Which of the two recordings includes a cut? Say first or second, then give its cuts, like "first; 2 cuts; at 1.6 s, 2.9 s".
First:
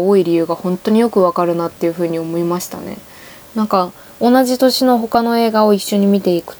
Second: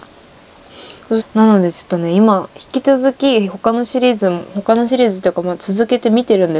second; 1 cut; at 1.2 s